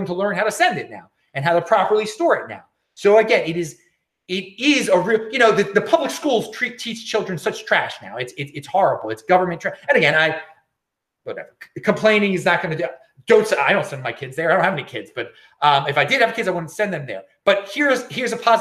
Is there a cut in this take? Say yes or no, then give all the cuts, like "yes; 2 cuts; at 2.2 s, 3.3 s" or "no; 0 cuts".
no; 0 cuts